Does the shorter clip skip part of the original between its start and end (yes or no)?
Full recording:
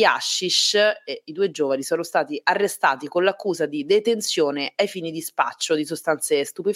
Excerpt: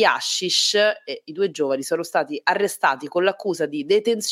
no